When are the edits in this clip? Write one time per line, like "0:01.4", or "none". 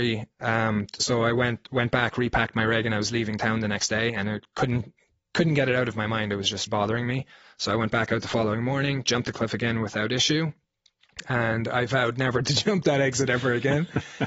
0:06.7